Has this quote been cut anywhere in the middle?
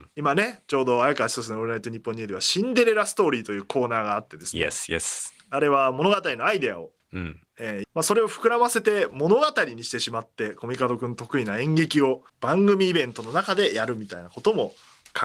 yes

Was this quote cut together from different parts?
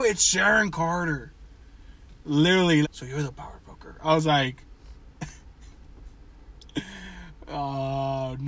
yes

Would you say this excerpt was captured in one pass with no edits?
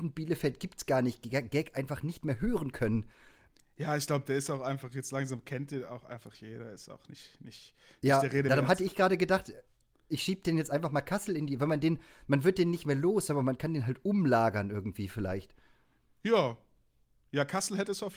yes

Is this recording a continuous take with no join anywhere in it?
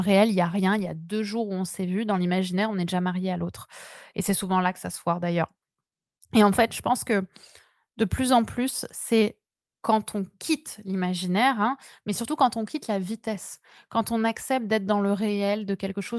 yes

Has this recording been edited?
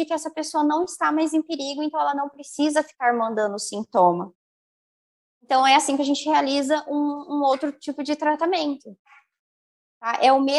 no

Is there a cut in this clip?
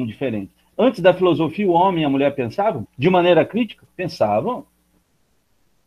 yes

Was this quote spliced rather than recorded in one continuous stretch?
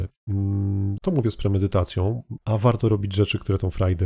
yes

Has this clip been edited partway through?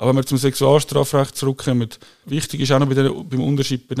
yes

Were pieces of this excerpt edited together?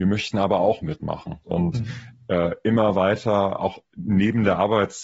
yes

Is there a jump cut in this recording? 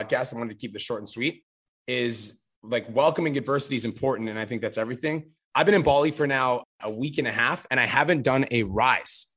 no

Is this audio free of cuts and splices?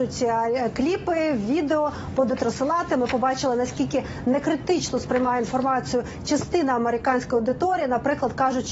yes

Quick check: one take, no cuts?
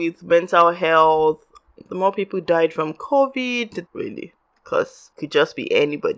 no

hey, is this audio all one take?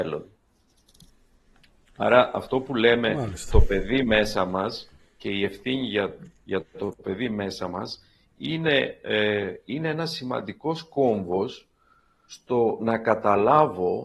yes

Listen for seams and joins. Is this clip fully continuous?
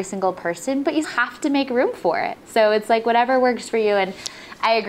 no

